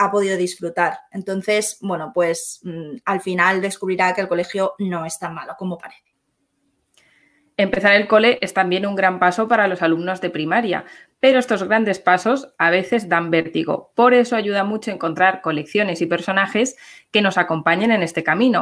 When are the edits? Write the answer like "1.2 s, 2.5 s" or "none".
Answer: none